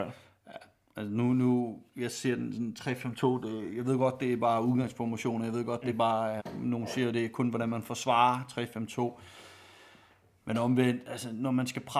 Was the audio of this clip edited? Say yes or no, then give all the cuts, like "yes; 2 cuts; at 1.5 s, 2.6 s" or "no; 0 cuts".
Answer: yes; 1 cut; at 6.4 s